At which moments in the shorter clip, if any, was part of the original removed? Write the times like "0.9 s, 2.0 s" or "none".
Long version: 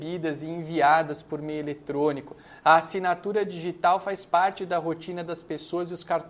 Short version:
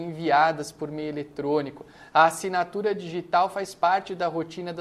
none